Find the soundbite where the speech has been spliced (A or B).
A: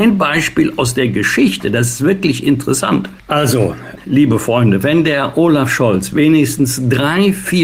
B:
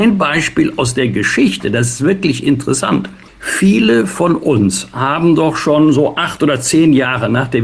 A